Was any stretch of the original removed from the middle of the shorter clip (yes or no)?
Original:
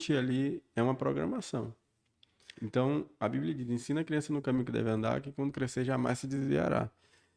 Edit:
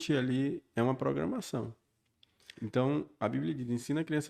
no